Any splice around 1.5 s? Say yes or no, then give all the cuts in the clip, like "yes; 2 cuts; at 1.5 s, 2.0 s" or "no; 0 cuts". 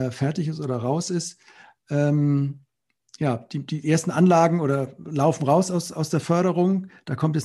no; 0 cuts